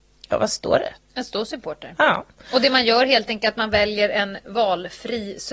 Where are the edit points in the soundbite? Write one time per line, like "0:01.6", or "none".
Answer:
0:01.0